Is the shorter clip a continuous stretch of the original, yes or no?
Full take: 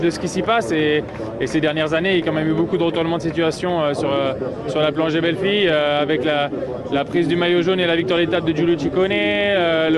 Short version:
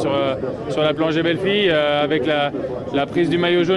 yes